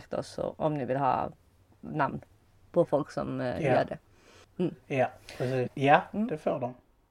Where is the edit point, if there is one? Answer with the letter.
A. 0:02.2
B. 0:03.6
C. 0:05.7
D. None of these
C